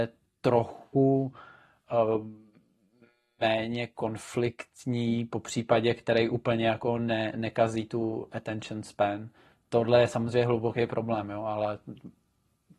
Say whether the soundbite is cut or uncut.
uncut